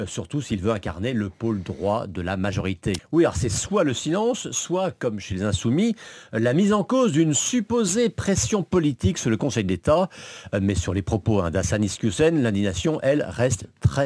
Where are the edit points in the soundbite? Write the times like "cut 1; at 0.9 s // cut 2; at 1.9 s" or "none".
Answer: cut 1; at 3.0 s